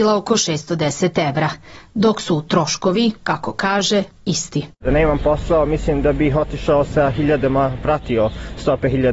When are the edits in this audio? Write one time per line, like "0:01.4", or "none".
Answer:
0:04.7